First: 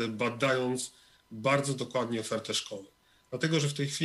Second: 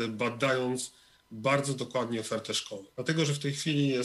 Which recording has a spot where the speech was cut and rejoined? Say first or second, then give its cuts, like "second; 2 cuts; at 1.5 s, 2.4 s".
second; 1 cut; at 2.9 s